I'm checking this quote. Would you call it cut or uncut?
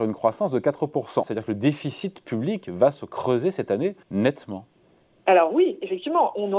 cut